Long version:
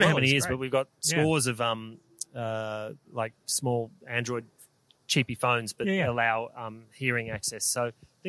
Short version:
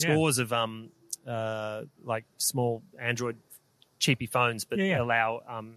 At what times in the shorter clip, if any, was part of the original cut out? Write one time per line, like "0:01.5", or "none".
none